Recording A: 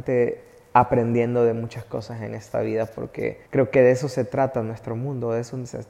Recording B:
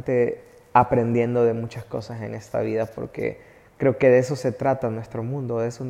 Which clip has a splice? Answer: A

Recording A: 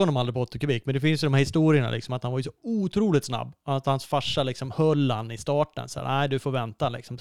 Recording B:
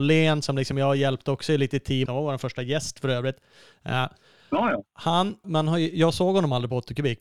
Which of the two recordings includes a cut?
B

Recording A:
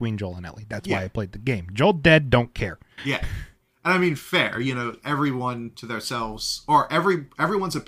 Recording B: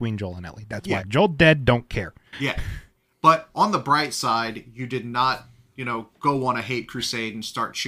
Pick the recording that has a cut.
B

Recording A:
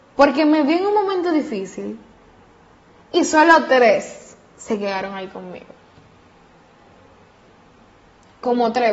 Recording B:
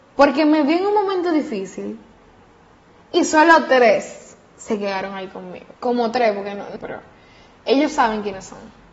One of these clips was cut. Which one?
B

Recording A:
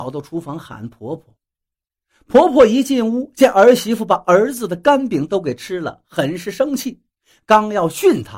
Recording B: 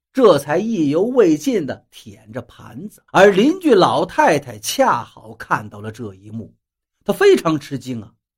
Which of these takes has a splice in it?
B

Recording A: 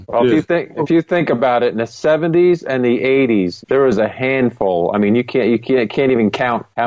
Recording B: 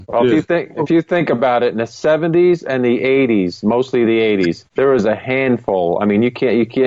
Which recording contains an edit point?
A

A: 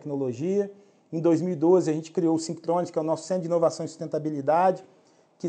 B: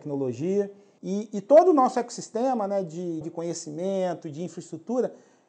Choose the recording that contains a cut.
B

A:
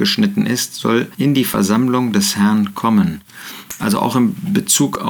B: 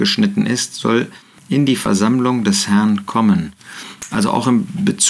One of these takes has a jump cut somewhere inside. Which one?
A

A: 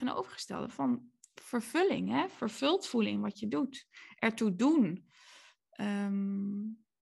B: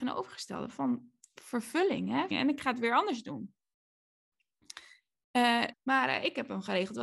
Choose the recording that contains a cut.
B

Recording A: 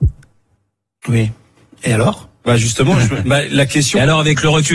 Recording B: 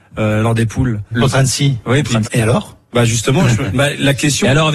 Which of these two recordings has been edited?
B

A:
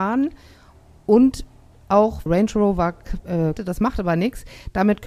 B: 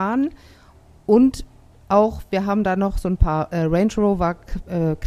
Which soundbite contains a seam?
A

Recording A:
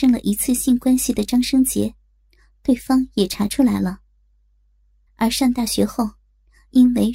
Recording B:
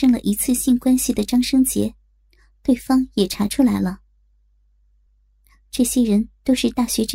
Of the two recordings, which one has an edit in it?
A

